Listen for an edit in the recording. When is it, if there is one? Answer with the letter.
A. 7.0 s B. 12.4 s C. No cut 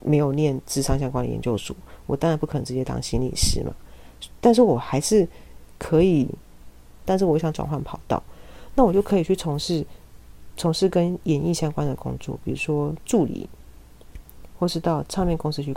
A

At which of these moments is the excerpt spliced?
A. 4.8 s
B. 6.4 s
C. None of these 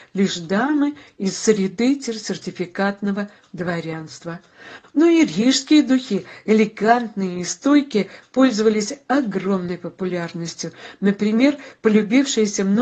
A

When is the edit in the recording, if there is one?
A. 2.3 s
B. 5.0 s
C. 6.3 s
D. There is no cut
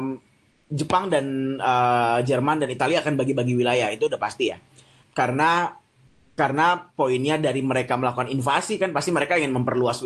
D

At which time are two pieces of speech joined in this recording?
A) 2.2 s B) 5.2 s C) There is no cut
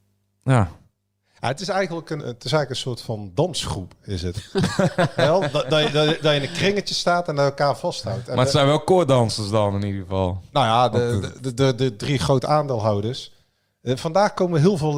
A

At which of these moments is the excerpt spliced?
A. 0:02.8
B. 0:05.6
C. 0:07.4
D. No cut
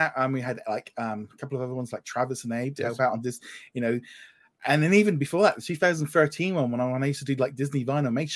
A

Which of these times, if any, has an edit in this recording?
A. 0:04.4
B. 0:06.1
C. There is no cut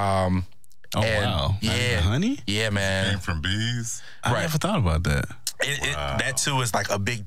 C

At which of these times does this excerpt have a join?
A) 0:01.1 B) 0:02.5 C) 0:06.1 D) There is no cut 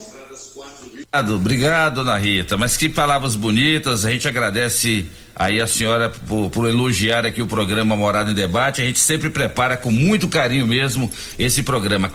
A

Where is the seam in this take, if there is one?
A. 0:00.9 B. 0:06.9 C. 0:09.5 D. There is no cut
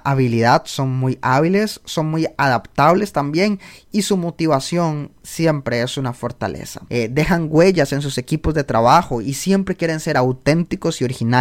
B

